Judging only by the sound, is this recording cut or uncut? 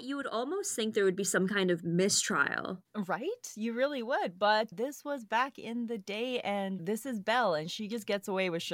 cut